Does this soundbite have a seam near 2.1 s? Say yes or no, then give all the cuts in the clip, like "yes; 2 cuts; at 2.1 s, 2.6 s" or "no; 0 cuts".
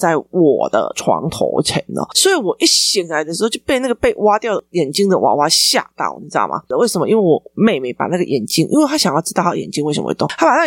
no; 1 cut; at 6.7 s